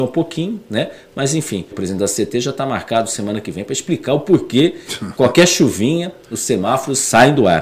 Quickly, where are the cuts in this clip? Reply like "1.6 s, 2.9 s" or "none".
1.7 s